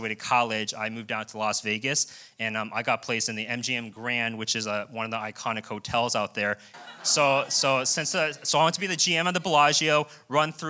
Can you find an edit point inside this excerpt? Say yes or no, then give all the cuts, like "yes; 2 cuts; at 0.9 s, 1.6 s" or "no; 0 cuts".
yes; 1 cut; at 6.7 s